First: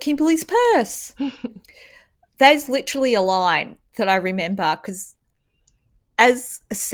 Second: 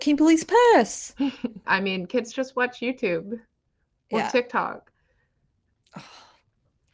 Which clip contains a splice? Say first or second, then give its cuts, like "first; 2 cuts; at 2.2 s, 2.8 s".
second; 1 cut; at 1.6 s